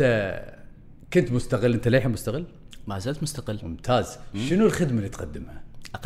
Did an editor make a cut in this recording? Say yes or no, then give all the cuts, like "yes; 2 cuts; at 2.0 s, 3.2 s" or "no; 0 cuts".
no; 0 cuts